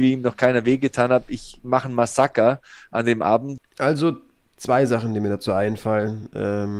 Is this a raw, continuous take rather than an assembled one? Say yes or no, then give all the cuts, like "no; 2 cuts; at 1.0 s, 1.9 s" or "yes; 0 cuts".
no; 1 cut; at 3.6 s